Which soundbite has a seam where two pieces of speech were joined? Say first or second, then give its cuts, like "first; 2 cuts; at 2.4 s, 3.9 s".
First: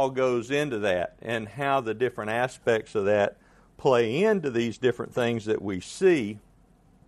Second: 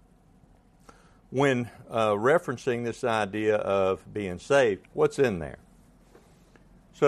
second; 1 cut; at 4.8 s